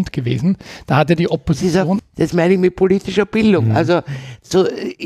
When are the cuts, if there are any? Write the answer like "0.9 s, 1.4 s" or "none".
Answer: 2.0 s